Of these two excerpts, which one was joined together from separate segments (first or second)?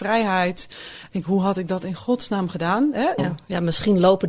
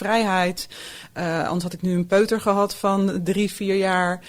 first